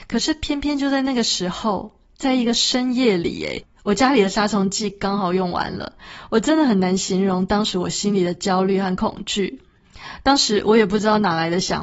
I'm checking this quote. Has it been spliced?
no; 0 cuts

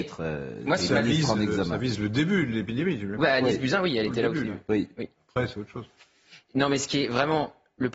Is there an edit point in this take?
no; 0 cuts

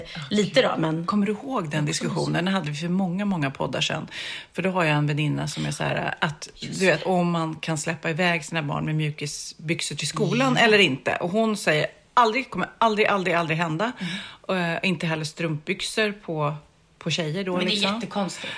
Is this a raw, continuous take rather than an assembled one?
yes; 0 cuts

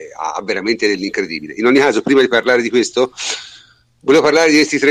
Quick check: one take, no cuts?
yes; 0 cuts

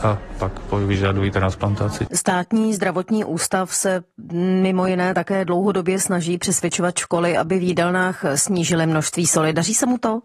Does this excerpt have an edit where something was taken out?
yes; 1 cut; at 2.1 s

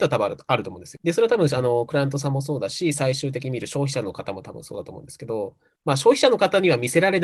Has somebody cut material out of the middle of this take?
no; 0 cuts

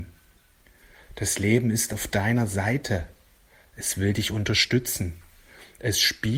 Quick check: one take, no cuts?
no; 1 cut; at 0.9 s

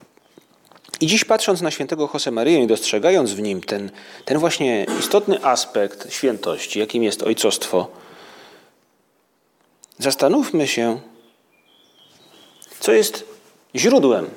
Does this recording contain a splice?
no; 0 cuts

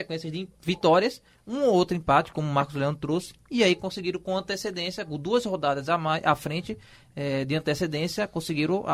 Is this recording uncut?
yes; 0 cuts

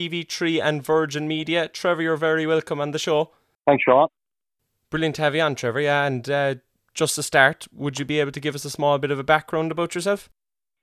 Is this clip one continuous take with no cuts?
yes; 0 cuts

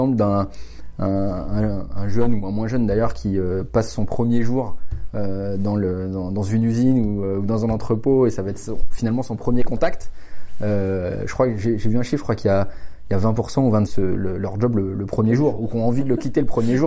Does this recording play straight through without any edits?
no; 1 cut; at 13.9 s

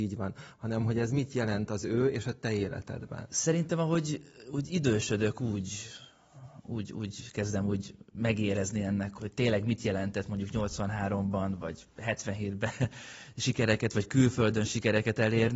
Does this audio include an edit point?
yes; 1 cut; at 9.2 s

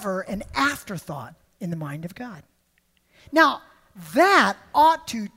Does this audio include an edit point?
no; 0 cuts

